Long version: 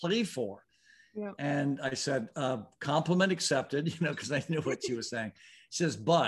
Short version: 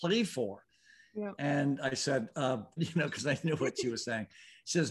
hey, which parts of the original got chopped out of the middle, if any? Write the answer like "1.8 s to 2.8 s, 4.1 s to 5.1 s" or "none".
2.8 s to 3.8 s